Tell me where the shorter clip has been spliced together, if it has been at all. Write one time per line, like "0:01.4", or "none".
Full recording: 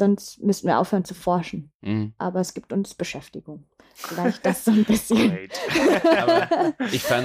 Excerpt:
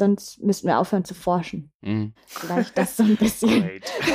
0:02.2